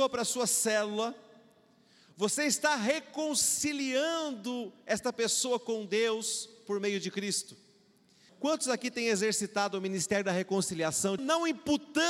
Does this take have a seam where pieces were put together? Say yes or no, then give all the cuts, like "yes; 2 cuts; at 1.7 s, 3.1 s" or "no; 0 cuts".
yes; 2 cuts; at 8.3 s, 11.2 s